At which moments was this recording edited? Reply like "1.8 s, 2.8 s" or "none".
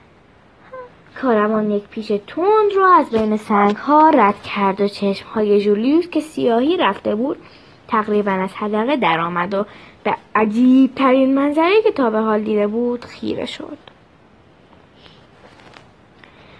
1.1 s